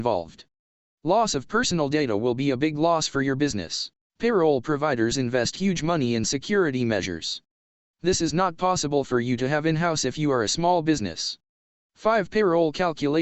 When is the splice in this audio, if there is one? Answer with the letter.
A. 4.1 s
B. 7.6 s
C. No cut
A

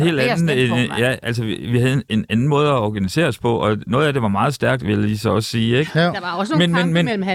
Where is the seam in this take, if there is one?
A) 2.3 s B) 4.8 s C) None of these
B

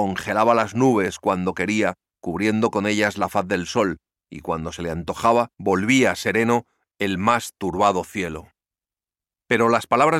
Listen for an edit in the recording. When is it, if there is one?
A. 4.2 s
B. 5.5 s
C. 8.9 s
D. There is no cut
B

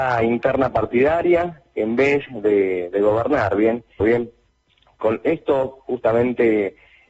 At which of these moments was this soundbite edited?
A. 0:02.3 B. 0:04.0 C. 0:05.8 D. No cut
B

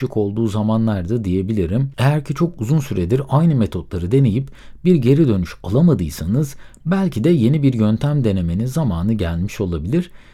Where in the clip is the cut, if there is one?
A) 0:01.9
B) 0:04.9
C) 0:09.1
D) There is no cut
A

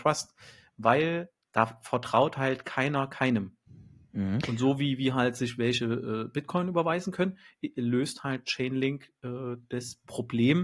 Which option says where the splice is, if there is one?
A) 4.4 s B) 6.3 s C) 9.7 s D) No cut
A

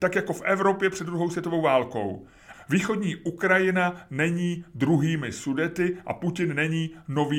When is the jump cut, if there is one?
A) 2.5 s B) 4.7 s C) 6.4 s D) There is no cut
A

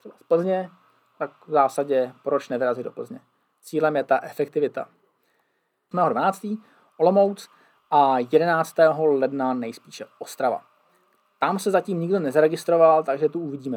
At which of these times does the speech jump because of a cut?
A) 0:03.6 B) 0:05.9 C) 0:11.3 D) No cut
B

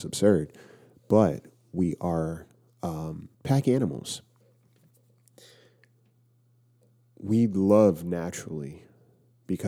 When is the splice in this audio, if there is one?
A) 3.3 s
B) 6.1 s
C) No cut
A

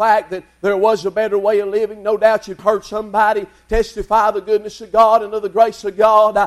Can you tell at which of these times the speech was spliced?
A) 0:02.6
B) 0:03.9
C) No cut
A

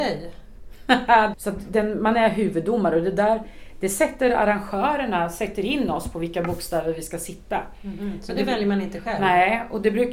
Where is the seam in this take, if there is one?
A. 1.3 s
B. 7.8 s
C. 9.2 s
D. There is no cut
A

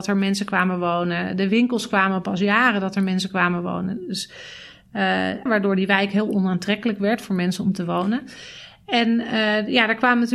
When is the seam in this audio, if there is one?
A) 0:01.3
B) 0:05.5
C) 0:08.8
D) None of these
B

